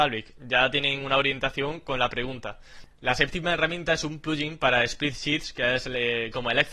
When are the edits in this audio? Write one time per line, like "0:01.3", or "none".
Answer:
none

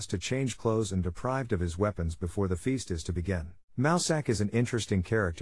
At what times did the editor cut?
0:03.7

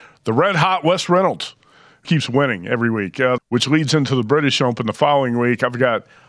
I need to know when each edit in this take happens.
0:02.0
0:03.4

